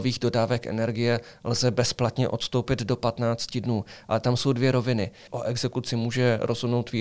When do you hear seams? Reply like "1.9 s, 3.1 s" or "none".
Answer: 5.3 s